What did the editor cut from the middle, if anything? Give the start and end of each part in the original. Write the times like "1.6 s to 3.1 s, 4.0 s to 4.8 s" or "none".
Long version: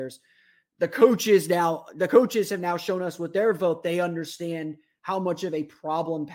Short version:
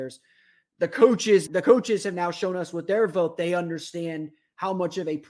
1.5 s to 1.9 s